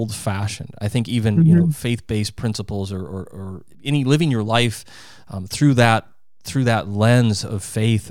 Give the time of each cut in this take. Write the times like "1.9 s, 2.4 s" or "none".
3.7 s